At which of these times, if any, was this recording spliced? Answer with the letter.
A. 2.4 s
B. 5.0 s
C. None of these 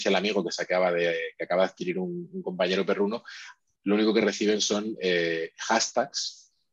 C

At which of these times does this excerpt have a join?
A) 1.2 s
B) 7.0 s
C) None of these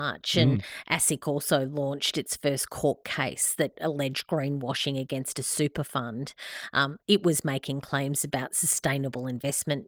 C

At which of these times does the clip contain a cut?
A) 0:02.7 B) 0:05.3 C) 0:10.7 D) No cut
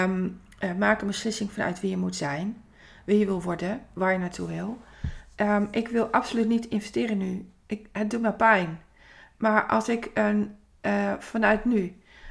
D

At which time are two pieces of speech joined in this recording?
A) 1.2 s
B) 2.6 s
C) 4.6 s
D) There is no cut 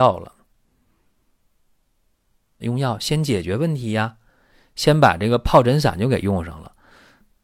B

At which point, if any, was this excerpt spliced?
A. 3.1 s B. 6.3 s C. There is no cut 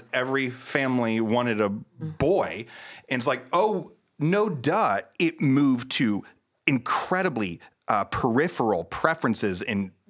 C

